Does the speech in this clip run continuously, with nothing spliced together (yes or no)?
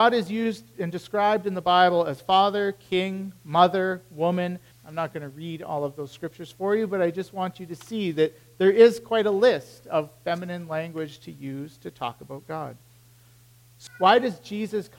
no